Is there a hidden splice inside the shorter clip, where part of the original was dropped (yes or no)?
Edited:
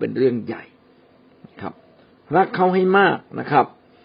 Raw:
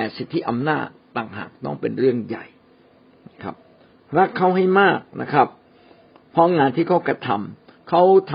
no